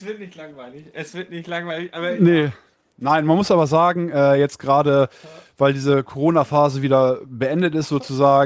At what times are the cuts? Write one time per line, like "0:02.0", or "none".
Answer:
none